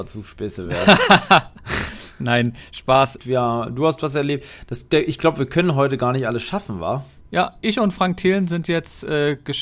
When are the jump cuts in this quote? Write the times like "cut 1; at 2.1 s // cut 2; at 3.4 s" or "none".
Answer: cut 1; at 3.2 s // cut 2; at 7.2 s